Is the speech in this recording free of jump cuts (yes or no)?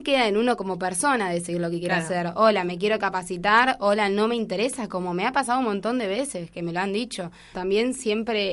no